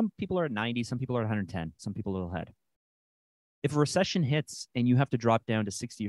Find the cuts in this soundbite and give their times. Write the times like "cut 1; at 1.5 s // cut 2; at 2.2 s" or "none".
cut 1; at 1.8 s